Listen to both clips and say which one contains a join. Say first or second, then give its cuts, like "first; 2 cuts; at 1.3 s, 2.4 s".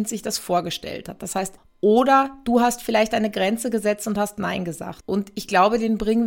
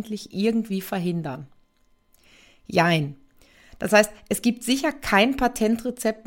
first; 2 cuts; at 1.6 s, 5.0 s